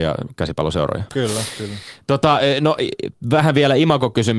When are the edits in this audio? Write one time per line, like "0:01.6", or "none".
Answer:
0:01.1

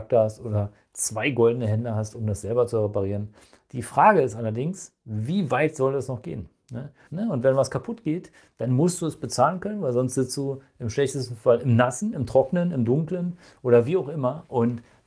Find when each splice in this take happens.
0:03.7
0:07.1
0:12.1

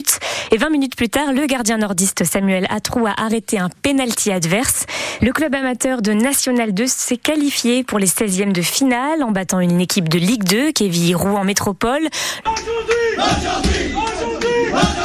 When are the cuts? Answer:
0:05.2
0:12.4

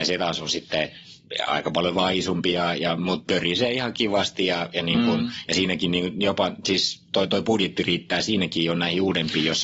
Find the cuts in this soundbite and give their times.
none

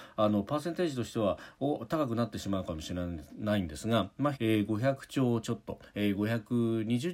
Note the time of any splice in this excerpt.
0:04.3

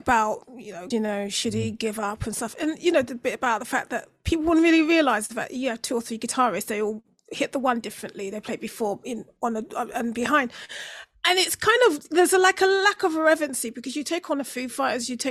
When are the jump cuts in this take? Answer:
0:00.9

